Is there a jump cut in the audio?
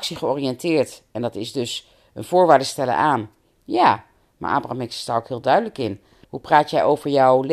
yes; 1 cut; at 6.2 s

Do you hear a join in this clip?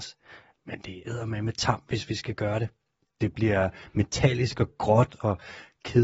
no; 0 cuts

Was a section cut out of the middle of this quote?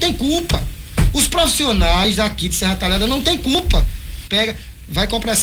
yes; 1 cut; at 4.3 s

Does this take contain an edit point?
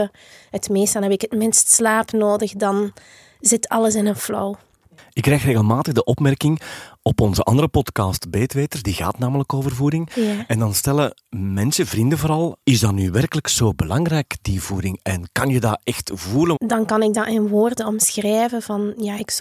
yes; 2 cuts; at 12.6 s, 16.6 s

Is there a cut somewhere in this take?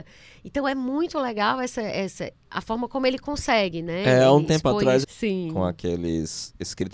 yes; 1 cut; at 5.0 s

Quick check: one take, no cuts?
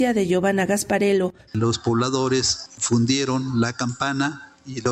no; 1 cut; at 1.5 s

